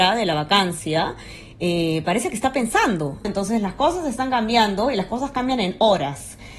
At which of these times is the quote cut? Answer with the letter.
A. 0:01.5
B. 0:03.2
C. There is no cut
B